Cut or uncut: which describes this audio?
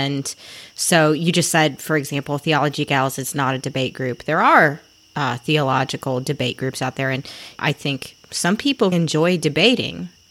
cut